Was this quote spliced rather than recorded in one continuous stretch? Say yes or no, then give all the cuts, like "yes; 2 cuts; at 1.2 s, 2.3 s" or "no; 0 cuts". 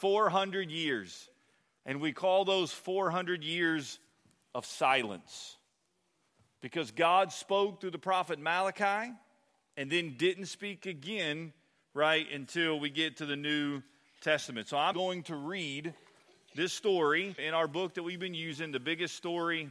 yes; 2 cuts; at 14.9 s, 17.4 s